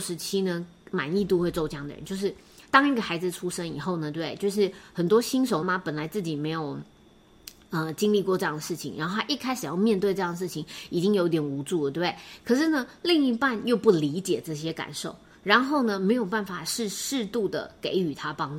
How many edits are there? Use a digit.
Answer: 1